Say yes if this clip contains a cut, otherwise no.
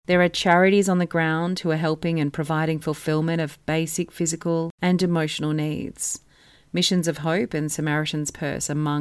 no